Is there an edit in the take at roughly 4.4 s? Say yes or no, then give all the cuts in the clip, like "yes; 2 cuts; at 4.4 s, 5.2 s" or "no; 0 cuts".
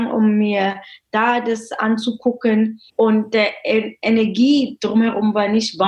no; 1 cut; at 2.9 s